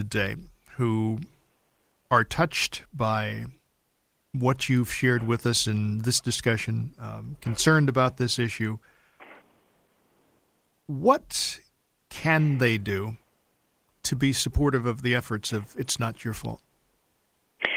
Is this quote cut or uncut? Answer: uncut